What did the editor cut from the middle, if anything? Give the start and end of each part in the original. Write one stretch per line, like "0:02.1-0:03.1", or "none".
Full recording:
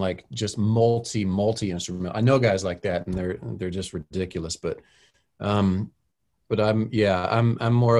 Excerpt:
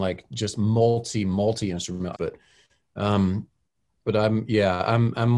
0:02.1-0:04.6